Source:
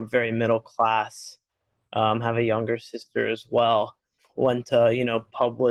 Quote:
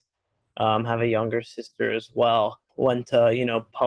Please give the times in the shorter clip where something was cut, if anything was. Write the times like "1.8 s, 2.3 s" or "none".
2.7 s